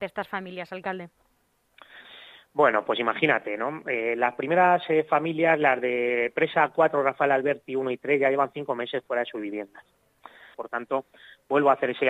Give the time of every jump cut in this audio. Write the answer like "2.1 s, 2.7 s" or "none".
10.5 s